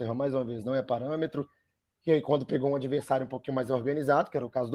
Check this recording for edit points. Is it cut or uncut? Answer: uncut